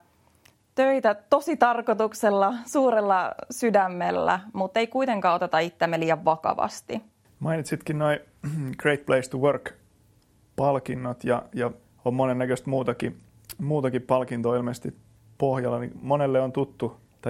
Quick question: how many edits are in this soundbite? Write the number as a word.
one